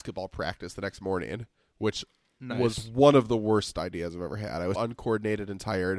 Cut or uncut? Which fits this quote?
cut